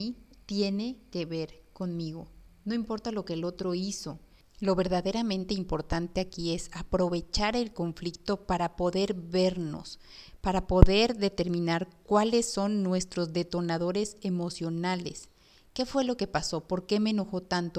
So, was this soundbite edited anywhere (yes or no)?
no